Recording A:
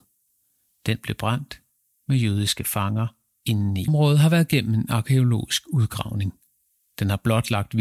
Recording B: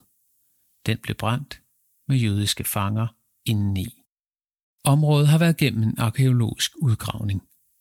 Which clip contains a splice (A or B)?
A